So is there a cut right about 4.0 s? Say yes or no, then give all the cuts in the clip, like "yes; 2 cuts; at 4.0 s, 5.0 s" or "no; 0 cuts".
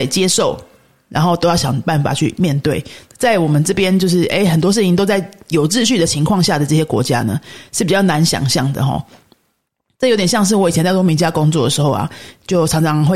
no; 0 cuts